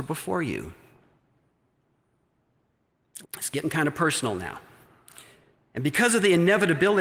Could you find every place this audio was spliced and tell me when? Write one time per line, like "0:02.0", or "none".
0:03.2